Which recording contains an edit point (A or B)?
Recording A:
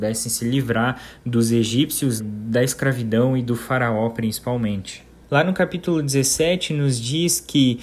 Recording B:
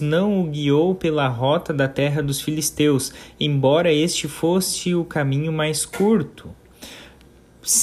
A